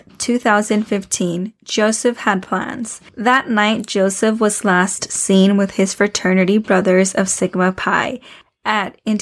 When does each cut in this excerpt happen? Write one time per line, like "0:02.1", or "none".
0:03.1